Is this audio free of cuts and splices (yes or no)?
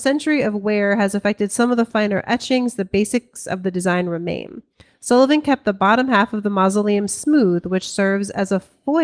yes